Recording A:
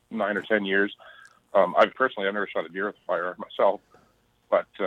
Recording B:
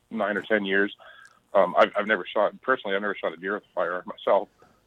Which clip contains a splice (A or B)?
A